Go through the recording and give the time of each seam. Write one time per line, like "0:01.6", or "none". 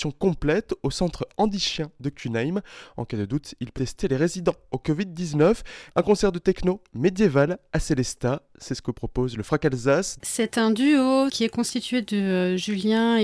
0:03.8
0:05.9
0:10.2